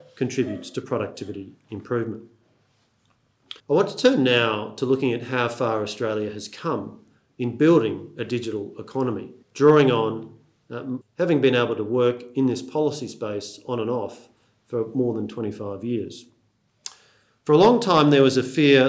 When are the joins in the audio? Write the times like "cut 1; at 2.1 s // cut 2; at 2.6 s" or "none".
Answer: cut 1; at 3.6 s // cut 2; at 9.4 s // cut 3; at 11.0 s